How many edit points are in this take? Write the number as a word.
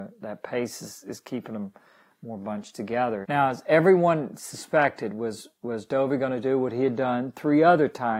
one